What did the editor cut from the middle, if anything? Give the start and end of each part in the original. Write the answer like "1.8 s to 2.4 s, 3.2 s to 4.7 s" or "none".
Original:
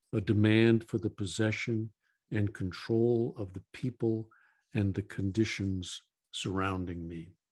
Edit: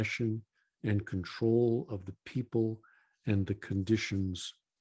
none